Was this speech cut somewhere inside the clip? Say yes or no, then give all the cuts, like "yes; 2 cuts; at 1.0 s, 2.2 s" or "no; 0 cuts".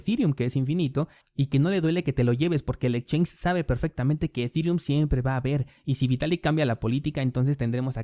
no; 0 cuts